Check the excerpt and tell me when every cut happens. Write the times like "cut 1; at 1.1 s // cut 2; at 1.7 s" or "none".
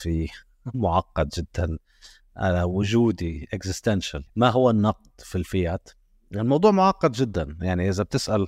cut 1; at 4.3 s

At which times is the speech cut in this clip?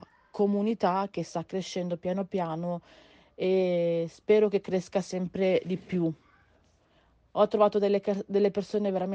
none

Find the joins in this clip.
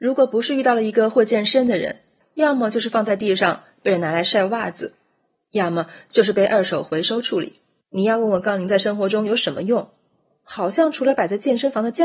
cut 1; at 2.2 s // cut 2; at 7.8 s

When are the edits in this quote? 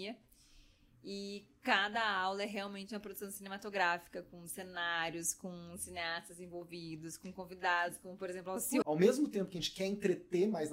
cut 1; at 8.8 s

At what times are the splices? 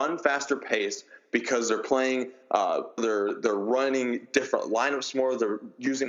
cut 1; at 3.0 s

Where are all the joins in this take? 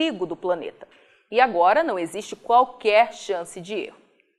none

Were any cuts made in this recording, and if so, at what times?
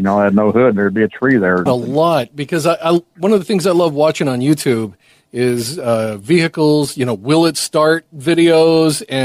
cut 1; at 1.7 s

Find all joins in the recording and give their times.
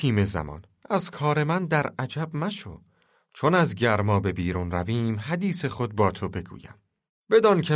none

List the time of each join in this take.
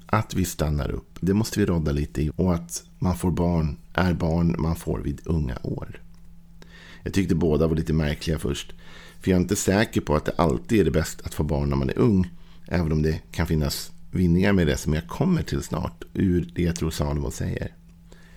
cut 1; at 1.2 s // cut 2; at 2.3 s

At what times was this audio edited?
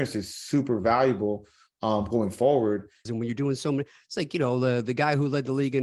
cut 1; at 3.1 s

